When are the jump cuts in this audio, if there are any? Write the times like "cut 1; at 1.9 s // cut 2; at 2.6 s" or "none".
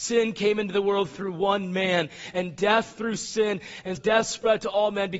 cut 1; at 4.0 s